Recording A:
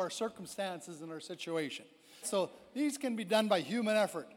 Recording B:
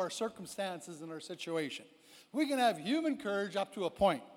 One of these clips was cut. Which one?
A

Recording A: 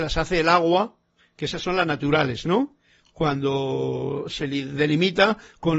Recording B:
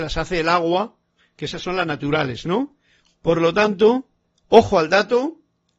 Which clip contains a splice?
B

